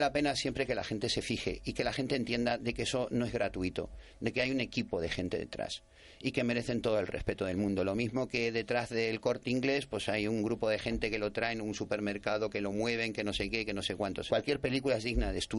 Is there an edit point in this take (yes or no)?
yes